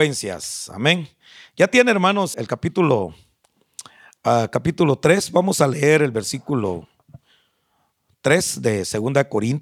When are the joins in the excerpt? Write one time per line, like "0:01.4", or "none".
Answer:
0:02.3